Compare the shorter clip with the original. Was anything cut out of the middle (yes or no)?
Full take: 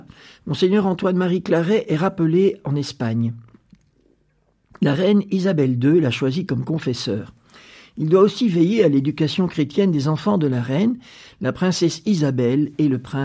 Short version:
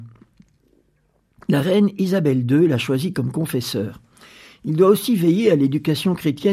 no